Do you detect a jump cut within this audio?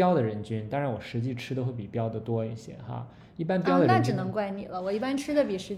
no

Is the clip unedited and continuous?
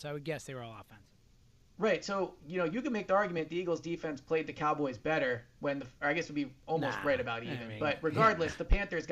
yes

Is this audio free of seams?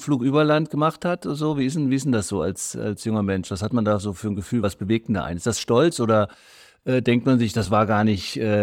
yes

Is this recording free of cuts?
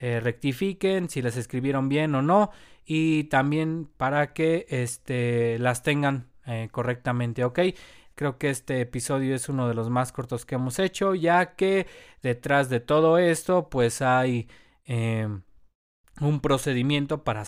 no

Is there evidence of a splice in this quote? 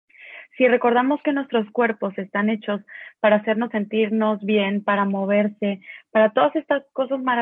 no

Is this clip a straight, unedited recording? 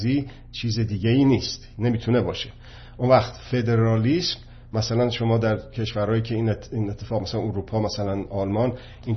yes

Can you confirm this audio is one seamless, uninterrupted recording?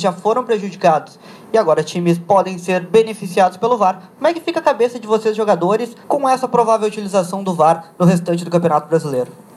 no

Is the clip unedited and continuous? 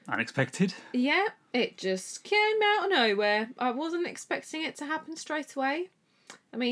yes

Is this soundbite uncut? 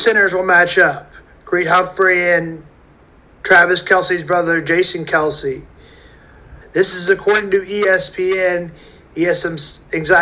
no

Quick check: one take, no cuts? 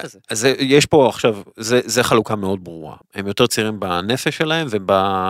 no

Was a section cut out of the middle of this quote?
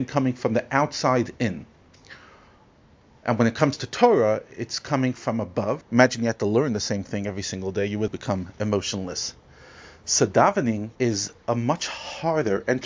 yes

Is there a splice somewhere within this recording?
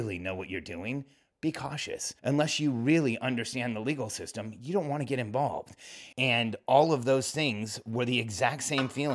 yes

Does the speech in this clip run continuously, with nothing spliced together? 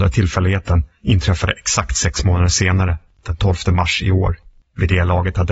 no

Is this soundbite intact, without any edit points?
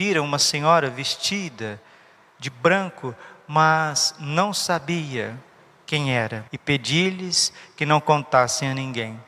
no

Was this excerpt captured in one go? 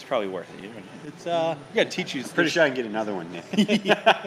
yes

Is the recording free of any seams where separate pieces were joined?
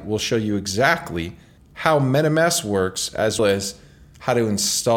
no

